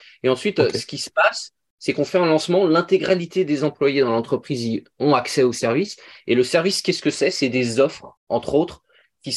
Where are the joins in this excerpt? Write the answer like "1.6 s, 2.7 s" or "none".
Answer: 8.2 s